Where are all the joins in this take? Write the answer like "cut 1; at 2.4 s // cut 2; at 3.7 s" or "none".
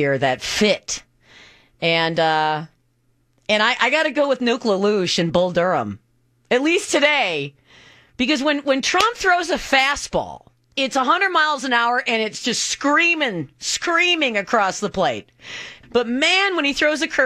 cut 1; at 10.7 s // cut 2; at 15.8 s